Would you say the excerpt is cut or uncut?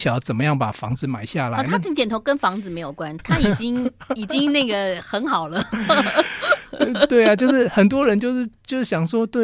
cut